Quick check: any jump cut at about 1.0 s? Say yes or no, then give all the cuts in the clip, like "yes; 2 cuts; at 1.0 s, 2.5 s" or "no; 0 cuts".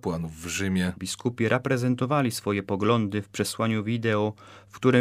yes; 1 cut; at 1.0 s